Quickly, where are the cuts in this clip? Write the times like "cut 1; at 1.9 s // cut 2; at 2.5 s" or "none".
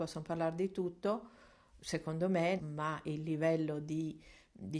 cut 1; at 2.6 s